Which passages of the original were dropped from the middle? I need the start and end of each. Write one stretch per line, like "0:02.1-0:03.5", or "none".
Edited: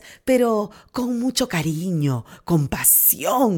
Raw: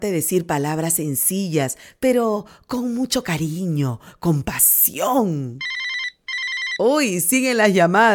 none